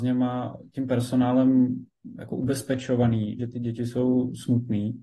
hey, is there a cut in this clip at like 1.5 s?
no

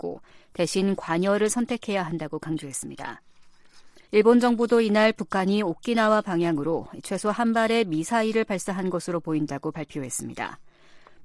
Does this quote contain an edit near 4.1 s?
yes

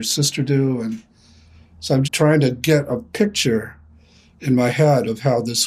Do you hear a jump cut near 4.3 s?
no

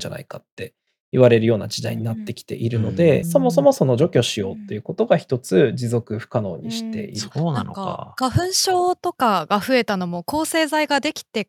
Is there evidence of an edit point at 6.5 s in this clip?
no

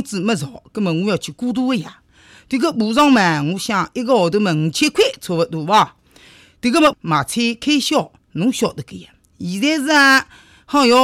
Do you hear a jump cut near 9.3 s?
no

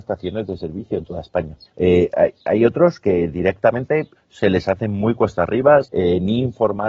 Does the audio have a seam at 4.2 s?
yes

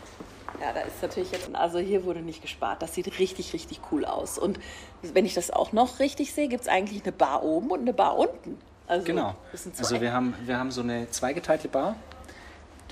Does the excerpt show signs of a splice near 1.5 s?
yes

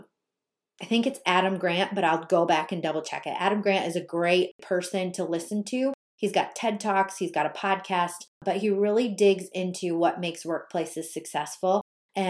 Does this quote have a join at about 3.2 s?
no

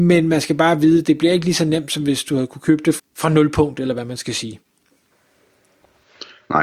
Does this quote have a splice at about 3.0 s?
yes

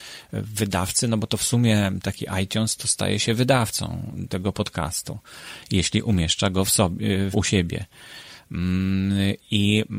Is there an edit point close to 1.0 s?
no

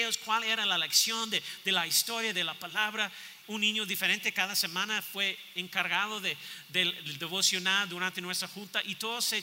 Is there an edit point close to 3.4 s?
yes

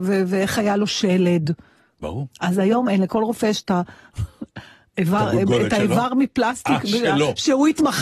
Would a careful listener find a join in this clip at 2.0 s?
yes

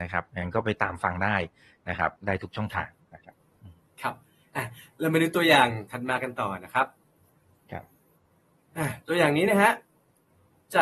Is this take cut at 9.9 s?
no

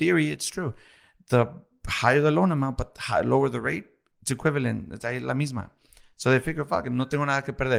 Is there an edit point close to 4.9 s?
no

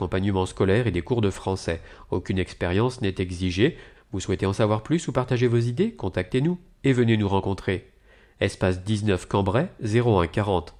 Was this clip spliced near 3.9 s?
yes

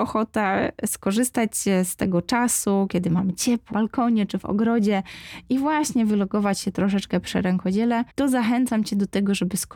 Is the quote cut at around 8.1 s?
yes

